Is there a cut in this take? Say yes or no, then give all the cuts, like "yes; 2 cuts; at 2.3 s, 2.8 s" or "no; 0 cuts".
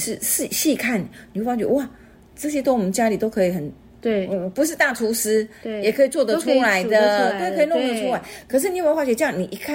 no; 0 cuts